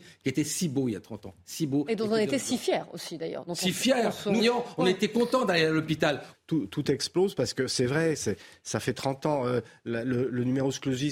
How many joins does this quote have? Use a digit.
2